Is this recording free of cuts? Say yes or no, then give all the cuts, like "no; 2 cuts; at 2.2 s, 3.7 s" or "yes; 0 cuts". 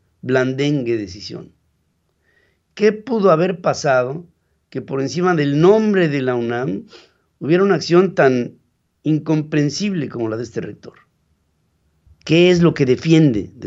no; 1 cut; at 12.1 s